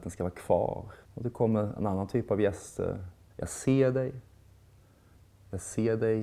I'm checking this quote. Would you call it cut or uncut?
cut